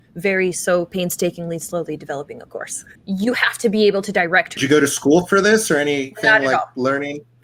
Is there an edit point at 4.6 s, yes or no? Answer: yes